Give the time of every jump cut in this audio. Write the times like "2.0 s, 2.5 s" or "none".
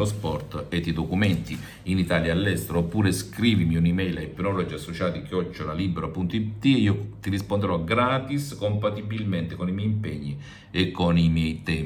none